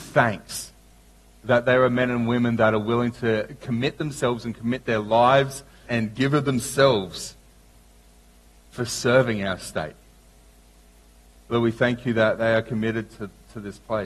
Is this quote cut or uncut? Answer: cut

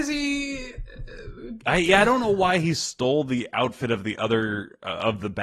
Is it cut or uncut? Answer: uncut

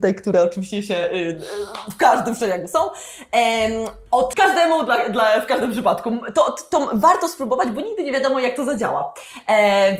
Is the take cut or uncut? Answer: cut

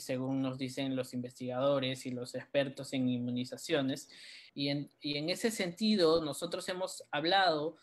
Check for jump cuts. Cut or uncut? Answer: cut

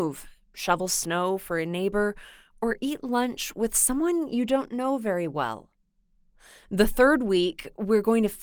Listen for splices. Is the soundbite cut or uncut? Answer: uncut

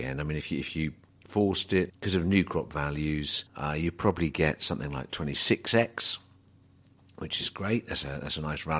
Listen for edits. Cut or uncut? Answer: cut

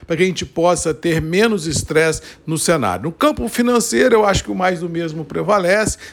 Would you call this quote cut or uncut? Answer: uncut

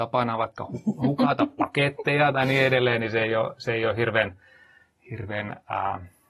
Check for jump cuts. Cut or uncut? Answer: uncut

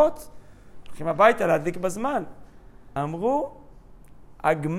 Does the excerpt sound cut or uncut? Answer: cut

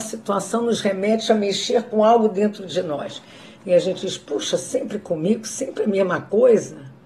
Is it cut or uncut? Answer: uncut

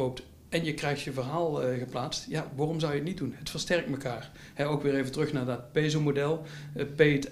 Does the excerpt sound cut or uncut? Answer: uncut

